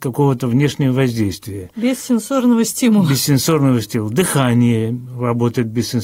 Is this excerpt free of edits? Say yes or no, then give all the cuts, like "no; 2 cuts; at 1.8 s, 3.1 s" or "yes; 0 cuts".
yes; 0 cuts